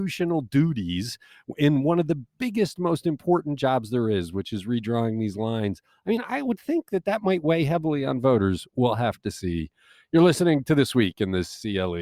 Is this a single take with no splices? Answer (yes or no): yes